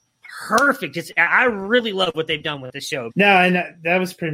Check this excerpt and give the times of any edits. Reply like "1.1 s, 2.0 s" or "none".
3.1 s